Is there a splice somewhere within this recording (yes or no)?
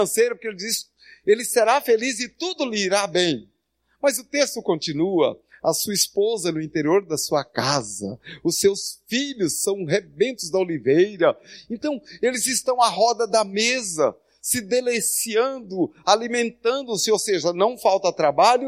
no